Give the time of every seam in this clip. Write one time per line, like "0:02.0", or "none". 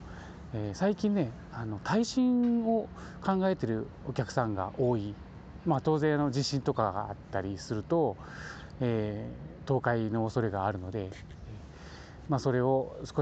none

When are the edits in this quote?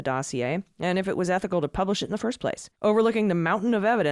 0:02.7

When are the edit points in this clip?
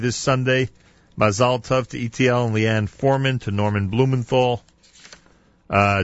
none

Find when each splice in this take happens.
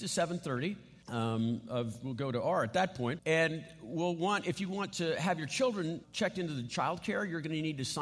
0:01.0
0:03.2
0:06.0

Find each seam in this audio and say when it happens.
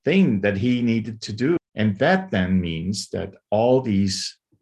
0:01.6

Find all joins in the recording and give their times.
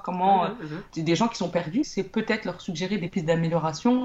0:01.8

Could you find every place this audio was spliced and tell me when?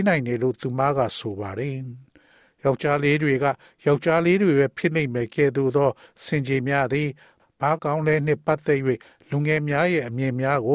0:07.8

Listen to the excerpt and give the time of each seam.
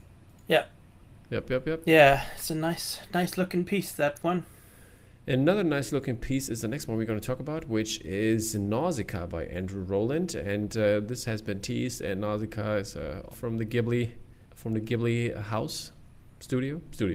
0:13.3
0:14.4

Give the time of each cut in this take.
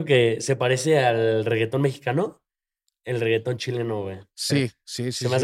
none

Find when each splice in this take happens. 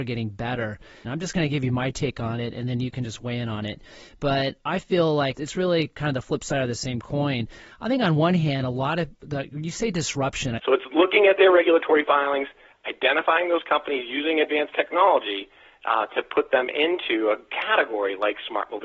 0:01.0
0:05.3
0:10.6

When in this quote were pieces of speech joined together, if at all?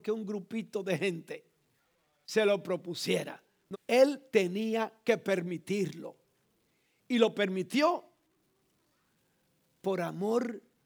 0:03.7

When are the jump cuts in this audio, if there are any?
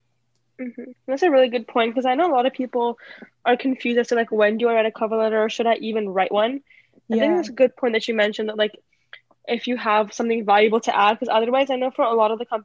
0:00.9

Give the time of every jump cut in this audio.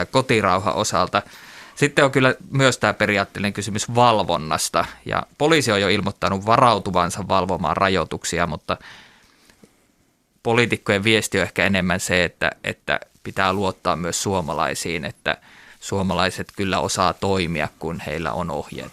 none

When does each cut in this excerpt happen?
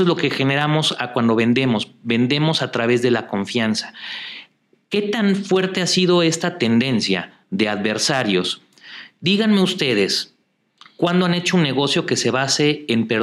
0:09.2

